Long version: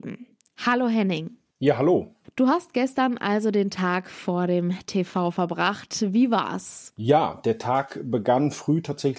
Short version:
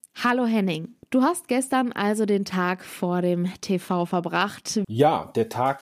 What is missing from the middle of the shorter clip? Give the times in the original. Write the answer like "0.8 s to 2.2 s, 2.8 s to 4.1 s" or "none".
1.5 s to 2.3 s, 6.1 s to 6.9 s